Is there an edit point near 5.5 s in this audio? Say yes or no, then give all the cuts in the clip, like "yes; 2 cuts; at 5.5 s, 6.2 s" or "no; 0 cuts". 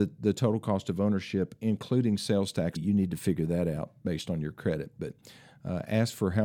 no; 1 cut; at 2.8 s